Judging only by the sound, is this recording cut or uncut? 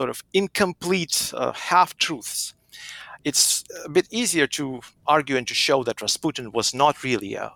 cut